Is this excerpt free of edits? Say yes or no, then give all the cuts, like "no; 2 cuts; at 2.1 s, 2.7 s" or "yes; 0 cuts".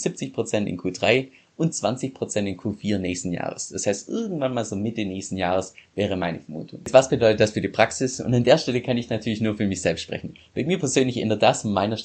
yes; 0 cuts